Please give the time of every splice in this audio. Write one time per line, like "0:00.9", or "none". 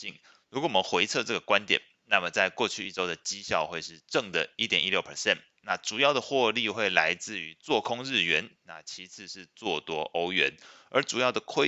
none